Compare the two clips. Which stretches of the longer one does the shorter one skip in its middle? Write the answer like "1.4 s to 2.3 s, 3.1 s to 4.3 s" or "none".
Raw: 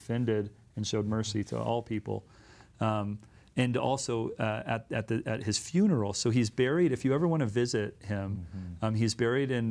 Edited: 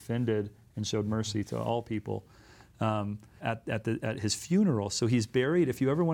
3.4 s to 4.6 s